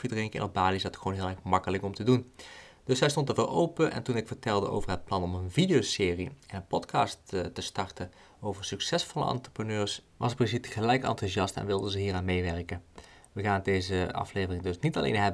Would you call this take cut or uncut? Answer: uncut